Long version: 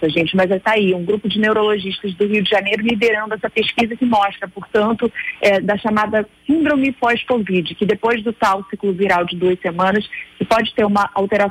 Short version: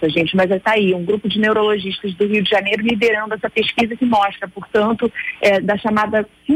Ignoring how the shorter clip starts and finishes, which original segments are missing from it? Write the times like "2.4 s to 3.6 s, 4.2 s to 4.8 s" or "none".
none

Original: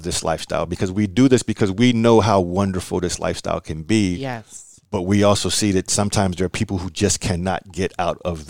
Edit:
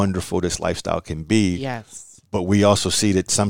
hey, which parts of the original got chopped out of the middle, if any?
none

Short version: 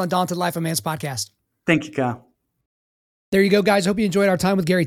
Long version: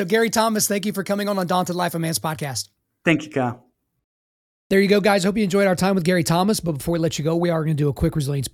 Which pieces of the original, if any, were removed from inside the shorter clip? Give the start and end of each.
none

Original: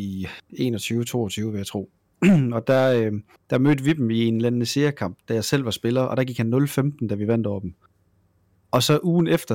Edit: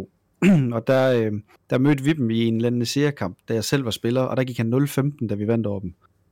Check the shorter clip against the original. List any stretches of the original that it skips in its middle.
none

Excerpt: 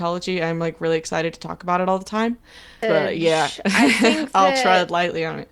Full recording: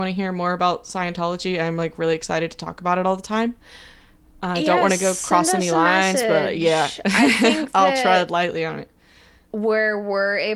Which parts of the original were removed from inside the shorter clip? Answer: 4.0 s to 6.2 s

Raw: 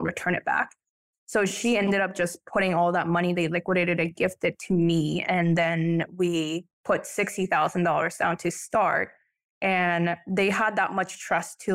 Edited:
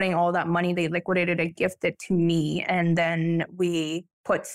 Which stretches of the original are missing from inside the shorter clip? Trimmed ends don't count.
none

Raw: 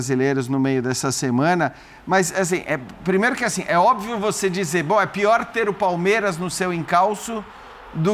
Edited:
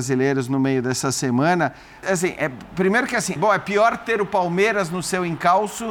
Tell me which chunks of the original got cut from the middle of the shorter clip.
2.0 s to 2.3 s, 3.6 s to 4.8 s

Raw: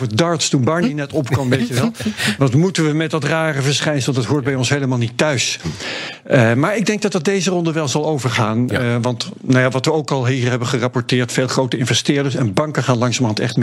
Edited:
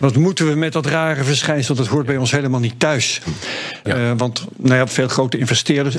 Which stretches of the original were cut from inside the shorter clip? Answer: 6.2 s to 8.7 s, 9.7 s to 11.3 s

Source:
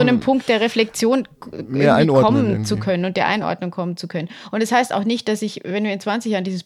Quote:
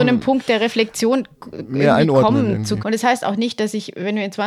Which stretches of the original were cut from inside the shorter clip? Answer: 2.8 s to 4.5 s

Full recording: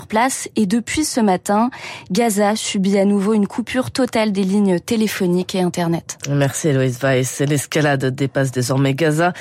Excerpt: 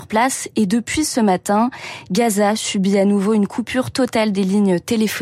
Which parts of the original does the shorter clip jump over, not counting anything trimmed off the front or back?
none

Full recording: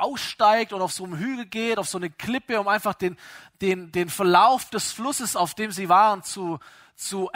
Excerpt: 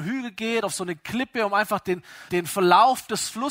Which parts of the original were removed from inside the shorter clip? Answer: 3.4 s to 3.9 s

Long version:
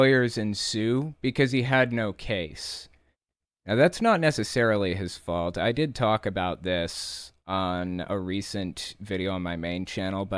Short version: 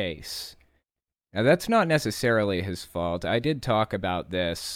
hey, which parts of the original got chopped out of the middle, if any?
none

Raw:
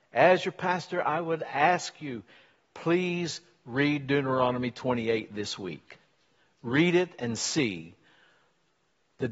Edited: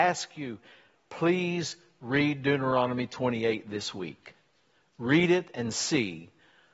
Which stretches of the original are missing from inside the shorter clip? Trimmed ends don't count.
none

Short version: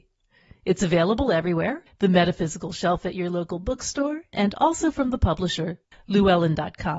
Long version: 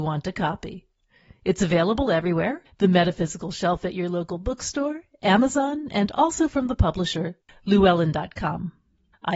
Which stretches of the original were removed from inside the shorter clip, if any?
5.1 s to 5.9 s

